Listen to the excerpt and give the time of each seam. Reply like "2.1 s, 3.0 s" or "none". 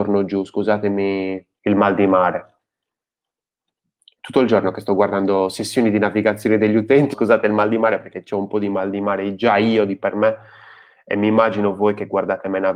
1.6 s, 7.1 s